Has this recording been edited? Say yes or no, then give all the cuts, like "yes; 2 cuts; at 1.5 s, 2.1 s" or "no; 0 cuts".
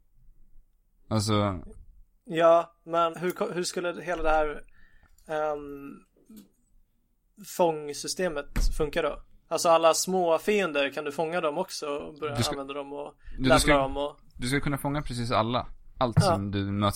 yes; 1 cut; at 3.1 s